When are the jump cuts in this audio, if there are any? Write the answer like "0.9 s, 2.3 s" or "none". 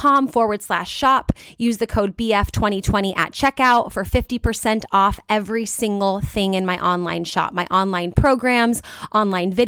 none